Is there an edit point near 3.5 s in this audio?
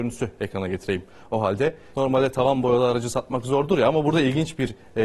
no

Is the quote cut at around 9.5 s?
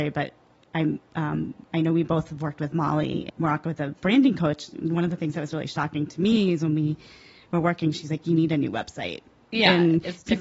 yes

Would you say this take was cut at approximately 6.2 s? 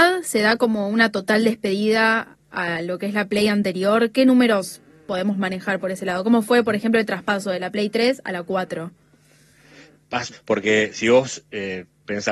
no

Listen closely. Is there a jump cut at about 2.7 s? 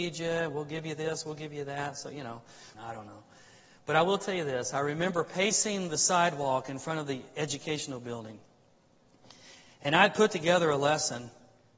yes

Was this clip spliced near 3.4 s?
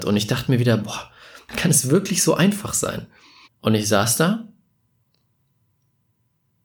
yes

